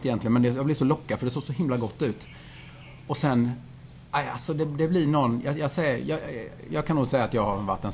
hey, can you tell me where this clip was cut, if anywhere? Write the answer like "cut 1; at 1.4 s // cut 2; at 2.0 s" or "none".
cut 1; at 6.7 s